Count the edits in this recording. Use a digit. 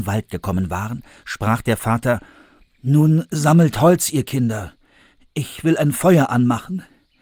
0